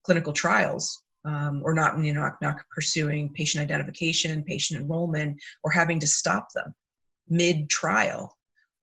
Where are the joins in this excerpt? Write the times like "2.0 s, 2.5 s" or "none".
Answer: none